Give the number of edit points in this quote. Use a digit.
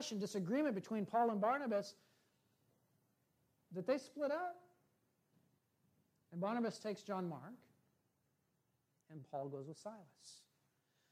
0